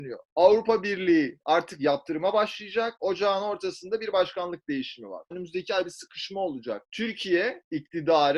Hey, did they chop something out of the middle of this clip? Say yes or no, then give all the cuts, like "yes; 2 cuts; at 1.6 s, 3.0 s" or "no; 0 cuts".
yes; 2 cuts; at 3.0 s, 5.3 s